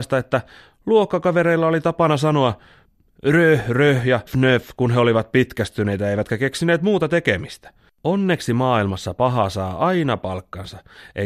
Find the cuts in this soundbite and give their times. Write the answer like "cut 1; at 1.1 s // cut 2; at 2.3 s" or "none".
cut 1; at 4.3 s // cut 2; at 7.9 s